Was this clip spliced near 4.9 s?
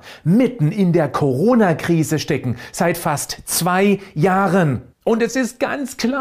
yes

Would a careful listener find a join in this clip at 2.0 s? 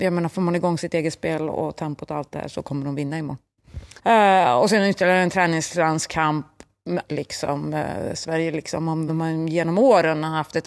no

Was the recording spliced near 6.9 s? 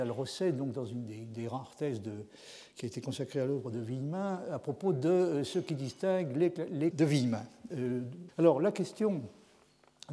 yes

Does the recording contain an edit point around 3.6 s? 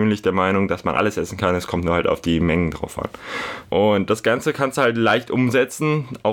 yes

